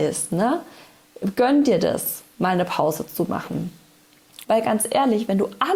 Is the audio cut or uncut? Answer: cut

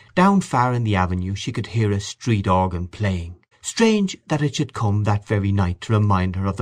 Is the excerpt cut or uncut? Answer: cut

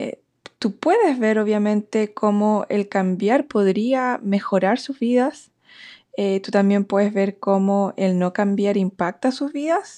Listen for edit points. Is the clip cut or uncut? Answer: uncut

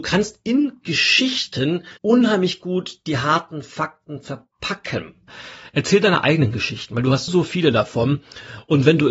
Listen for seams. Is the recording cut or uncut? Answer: cut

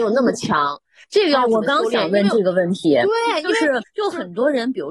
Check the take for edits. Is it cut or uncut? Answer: uncut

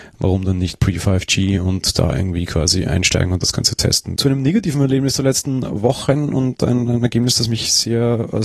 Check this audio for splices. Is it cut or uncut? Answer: cut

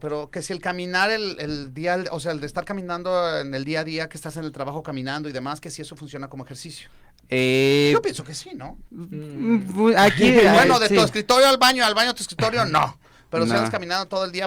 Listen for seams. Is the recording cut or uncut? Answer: cut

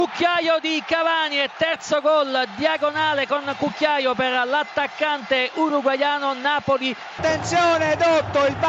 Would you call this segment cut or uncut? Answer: cut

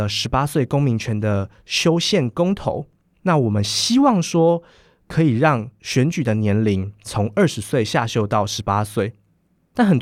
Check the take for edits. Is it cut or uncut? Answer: uncut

